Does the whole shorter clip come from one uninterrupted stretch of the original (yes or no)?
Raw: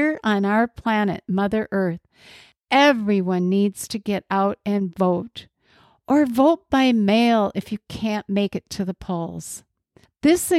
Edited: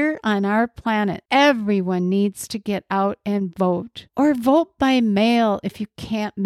no